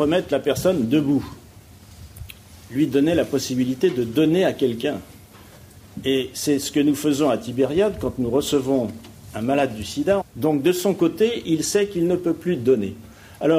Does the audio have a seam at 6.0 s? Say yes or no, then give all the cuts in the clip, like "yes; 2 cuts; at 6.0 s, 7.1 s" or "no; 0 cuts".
no; 1 cut; at 10.2 s